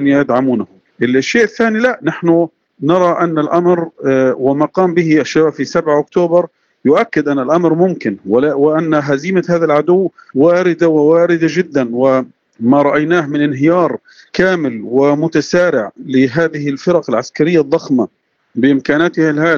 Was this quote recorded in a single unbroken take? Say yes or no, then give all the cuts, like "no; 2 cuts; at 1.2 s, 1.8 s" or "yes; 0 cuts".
yes; 0 cuts